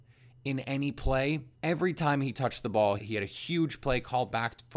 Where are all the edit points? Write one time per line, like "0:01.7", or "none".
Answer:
0:01.6
0:03.0